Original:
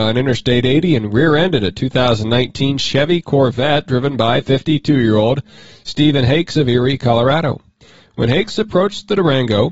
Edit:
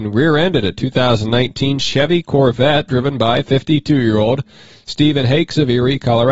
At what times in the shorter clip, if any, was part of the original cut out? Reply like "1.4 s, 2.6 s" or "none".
none